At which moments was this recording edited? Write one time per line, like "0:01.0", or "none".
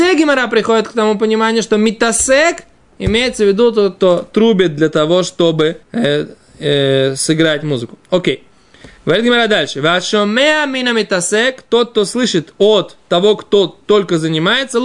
0:05.8